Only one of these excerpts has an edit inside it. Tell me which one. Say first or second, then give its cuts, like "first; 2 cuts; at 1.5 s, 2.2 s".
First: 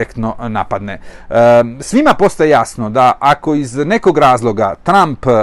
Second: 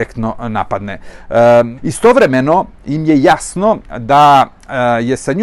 second; 1 cut; at 1.8 s